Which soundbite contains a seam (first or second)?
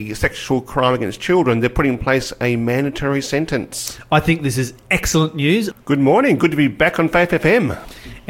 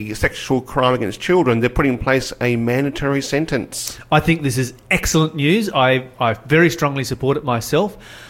first